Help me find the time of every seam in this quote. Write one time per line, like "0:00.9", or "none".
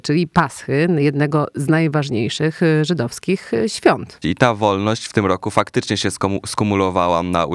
0:04.2

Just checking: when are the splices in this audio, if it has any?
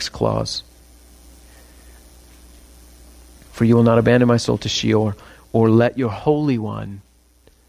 none

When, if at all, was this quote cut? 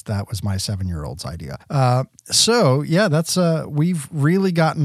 0:01.6

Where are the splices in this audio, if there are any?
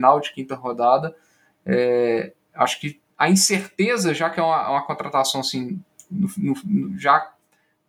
0:03.1

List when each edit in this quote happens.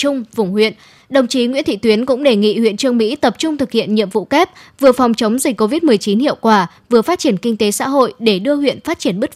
0:01.0

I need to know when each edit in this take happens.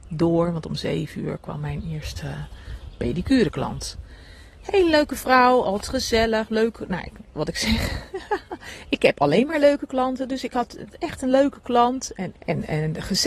0:12.3

